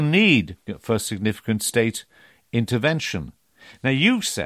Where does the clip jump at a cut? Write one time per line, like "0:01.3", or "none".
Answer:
none